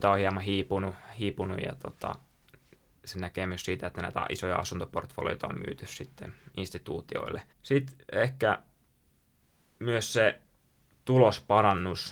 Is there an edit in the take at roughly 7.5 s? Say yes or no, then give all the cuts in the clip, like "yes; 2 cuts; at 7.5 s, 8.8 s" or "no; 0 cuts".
yes; 1 cut; at 7.5 s